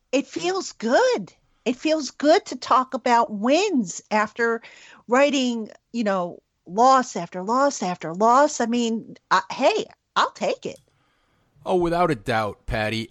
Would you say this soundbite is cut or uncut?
uncut